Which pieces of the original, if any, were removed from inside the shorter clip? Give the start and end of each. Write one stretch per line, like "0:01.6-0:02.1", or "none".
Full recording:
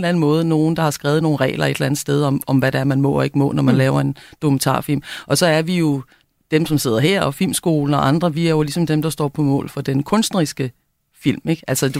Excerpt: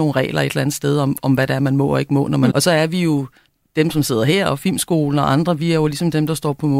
0:03.7-0:05.3